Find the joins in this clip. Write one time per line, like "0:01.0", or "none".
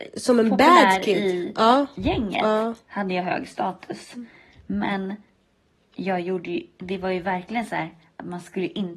none